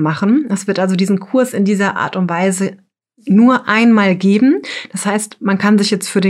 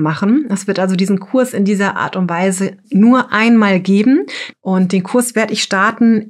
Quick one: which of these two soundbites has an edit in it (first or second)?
second